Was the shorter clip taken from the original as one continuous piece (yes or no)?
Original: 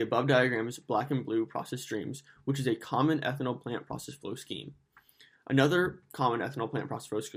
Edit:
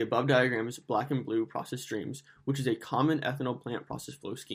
yes